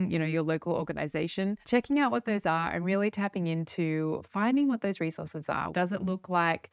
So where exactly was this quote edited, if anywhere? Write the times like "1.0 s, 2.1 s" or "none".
1.6 s, 5.7 s